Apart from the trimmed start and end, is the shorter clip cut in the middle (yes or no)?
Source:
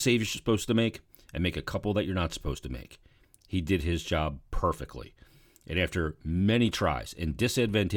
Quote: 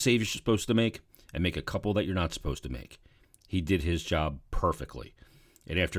no